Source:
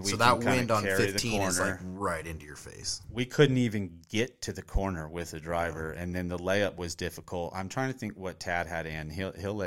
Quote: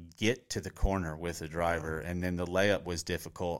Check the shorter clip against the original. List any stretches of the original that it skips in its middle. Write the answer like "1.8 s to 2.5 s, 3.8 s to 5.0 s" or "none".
none